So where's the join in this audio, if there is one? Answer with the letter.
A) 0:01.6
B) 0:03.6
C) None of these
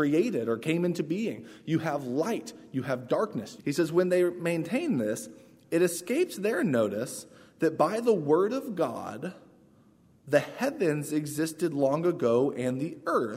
B